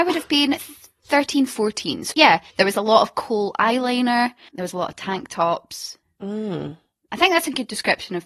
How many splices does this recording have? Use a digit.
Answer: 3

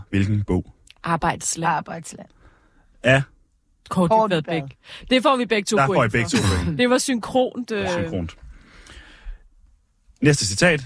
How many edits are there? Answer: 0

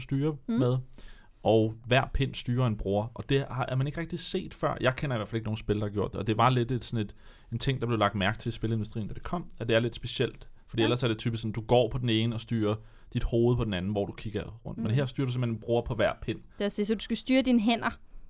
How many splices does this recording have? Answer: 0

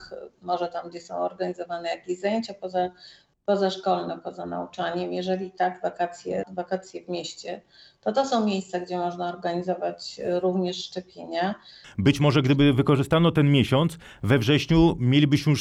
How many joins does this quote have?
2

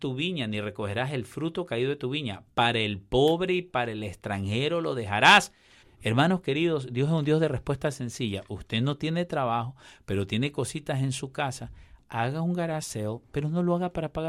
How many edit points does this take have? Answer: 1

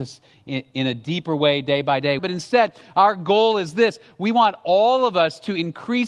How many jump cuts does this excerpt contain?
1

